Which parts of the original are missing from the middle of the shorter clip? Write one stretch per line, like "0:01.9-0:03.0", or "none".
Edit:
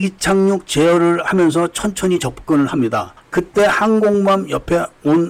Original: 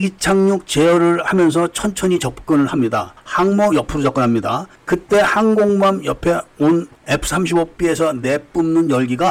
0:03.2-0:04.8